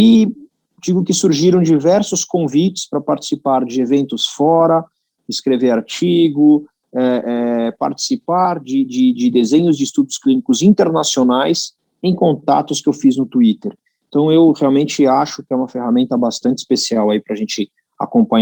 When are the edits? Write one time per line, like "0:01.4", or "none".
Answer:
none